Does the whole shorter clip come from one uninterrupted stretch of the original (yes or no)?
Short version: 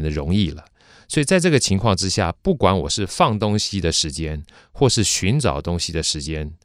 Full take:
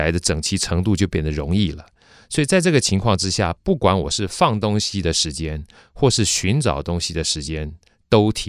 yes